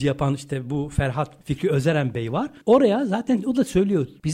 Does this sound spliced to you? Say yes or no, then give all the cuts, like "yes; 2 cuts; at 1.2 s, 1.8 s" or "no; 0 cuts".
no; 0 cuts